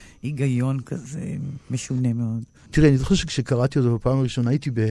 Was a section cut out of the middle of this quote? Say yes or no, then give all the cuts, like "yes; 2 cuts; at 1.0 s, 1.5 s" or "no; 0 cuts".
yes; 1 cut; at 2.7 s